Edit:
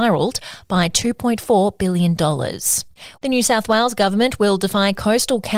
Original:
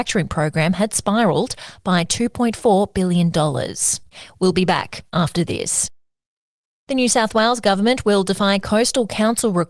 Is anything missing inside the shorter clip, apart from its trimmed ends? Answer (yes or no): yes